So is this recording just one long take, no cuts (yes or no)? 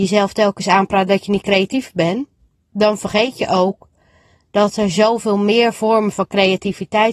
yes